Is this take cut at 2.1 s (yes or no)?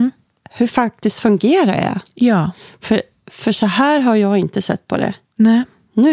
no